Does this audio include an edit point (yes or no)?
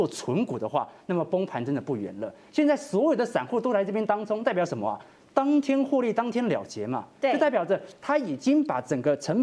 no